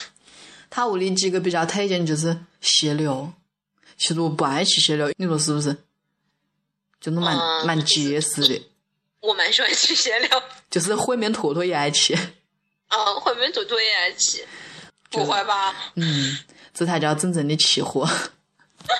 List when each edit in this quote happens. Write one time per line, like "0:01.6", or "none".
0:05.1
0:14.9